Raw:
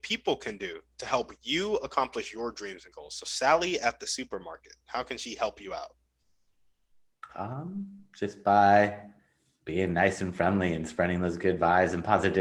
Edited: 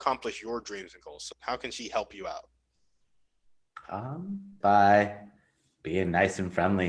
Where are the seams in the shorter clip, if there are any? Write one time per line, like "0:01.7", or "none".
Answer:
0:01.3
0:04.6